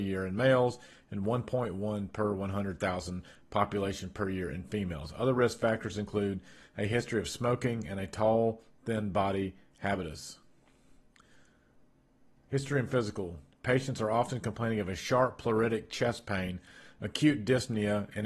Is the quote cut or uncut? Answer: cut